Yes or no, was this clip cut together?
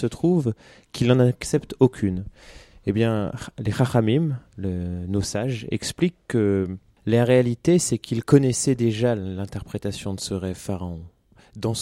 no